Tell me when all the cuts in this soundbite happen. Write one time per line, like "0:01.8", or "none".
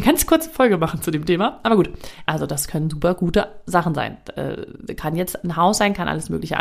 0:02.3